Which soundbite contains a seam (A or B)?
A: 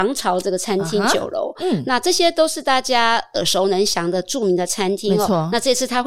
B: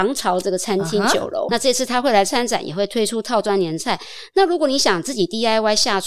B